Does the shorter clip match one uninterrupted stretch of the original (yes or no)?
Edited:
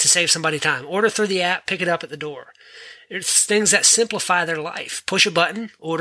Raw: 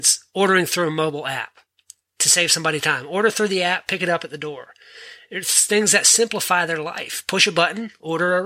yes